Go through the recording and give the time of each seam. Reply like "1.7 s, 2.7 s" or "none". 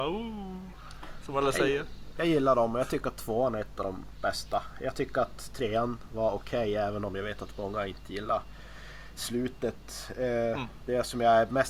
none